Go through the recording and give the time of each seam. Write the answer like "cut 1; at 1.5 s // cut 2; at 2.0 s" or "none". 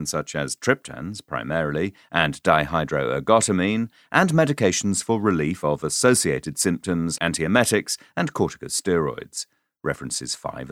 cut 1; at 7.2 s

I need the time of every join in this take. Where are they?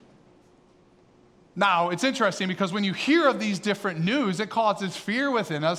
none

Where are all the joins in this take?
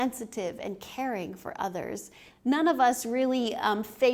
cut 1; at 2.3 s

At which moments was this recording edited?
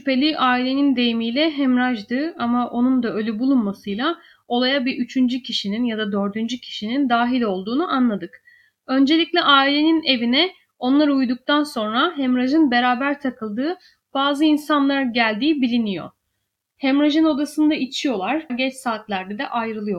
cut 1; at 18.5 s

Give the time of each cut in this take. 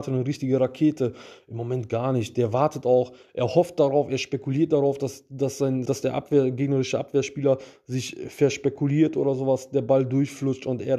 cut 1; at 5.9 s

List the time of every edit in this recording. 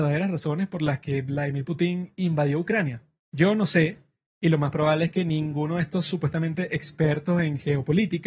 cut 1; at 3.2 s

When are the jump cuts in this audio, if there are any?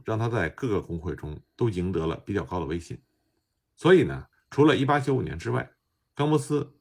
cut 1; at 4.3 s

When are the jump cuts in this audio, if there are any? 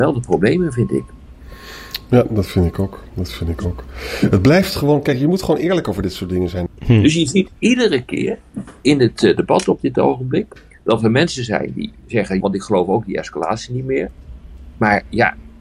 cut 1; at 6.7 s // cut 2; at 12.4 s

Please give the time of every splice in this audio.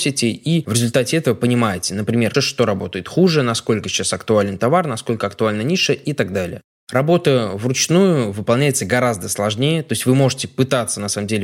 cut 1; at 2.3 s

